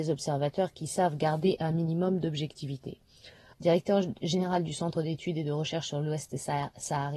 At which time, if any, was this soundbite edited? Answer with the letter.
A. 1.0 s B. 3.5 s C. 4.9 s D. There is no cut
B